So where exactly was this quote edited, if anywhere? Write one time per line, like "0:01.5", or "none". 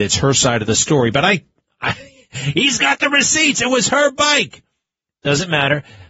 none